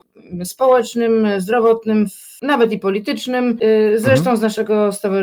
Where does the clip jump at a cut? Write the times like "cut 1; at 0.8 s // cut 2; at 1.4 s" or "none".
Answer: none